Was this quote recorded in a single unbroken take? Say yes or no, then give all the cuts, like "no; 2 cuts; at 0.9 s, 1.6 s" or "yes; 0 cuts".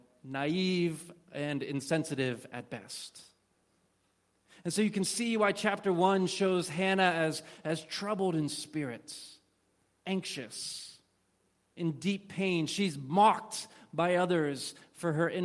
yes; 0 cuts